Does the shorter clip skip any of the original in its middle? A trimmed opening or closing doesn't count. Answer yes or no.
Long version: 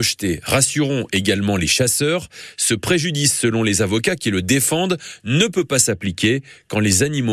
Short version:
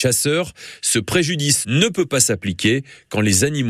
yes